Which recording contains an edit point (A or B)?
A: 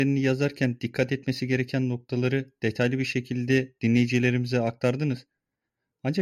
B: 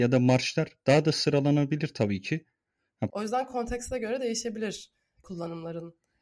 B